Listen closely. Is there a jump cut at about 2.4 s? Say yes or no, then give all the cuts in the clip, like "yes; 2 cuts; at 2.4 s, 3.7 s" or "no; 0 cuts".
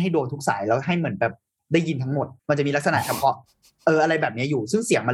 yes; 1 cut; at 2.4 s